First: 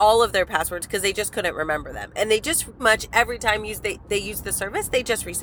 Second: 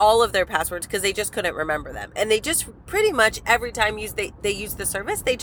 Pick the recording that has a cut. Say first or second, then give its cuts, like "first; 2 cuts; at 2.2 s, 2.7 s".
first; 1 cut; at 2.8 s